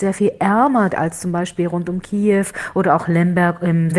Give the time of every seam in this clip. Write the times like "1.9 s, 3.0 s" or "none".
0.9 s